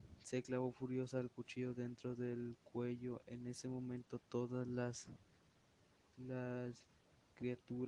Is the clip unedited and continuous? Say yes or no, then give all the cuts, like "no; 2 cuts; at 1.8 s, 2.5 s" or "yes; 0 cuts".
yes; 0 cuts